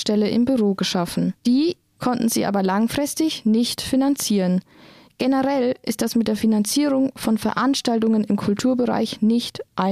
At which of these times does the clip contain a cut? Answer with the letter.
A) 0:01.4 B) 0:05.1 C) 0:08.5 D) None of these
A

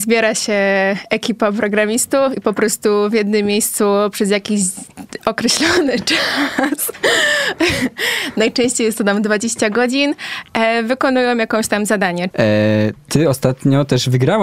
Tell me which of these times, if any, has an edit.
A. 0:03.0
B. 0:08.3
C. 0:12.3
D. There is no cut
C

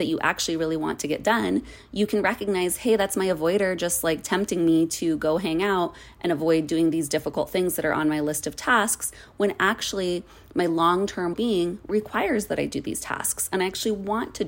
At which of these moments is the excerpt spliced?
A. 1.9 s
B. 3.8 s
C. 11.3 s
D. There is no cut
C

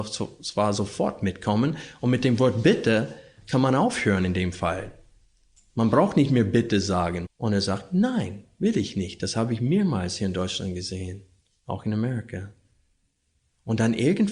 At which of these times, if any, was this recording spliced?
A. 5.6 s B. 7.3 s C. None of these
B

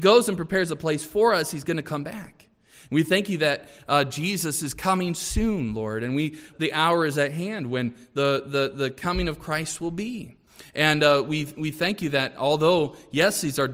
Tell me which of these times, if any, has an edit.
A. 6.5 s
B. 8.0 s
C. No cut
A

